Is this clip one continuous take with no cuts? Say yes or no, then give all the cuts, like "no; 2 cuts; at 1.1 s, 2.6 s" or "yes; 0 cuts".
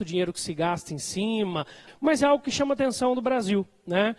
no; 1 cut; at 1.9 s